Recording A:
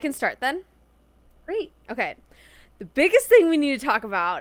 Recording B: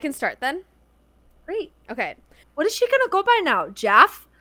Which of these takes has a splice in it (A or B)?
B